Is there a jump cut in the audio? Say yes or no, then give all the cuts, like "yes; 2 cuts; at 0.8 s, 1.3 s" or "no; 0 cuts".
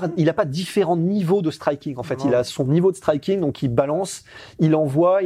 no; 0 cuts